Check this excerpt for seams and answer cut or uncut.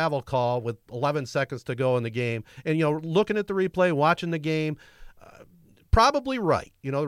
uncut